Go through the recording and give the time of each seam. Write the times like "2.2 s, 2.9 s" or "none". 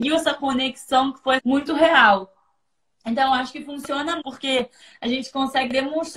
1.4 s, 4.2 s